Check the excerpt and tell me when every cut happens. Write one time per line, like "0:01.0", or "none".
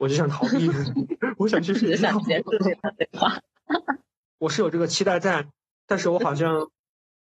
0:04.3